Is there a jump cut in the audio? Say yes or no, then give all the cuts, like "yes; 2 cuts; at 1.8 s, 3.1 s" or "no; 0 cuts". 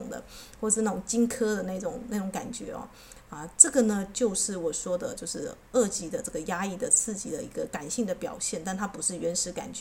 no; 0 cuts